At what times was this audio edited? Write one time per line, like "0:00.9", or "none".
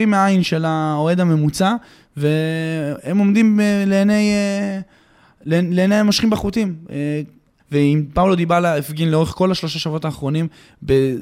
0:07.6